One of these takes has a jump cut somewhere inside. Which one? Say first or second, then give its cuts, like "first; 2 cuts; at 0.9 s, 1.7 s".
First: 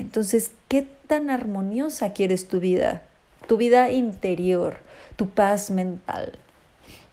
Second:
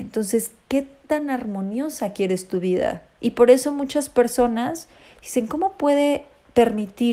second; 1 cut; at 3.2 s